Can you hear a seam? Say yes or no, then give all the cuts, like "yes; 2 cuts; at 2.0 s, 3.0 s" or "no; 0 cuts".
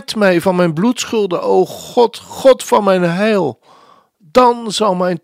no; 0 cuts